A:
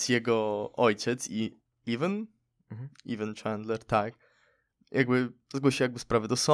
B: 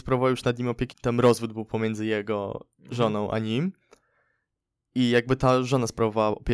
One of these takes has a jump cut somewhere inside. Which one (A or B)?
B